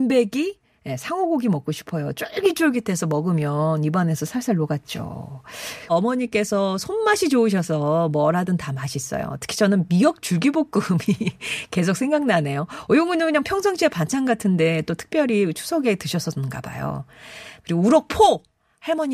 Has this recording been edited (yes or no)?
yes